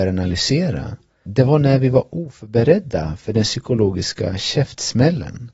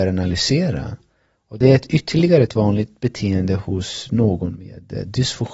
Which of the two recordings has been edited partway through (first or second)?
first